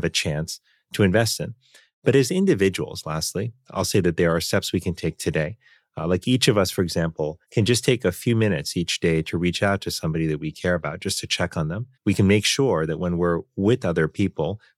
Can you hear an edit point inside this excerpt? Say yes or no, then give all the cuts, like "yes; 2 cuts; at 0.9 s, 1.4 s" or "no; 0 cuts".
yes; 2 cuts; at 7.4 s, 11.9 s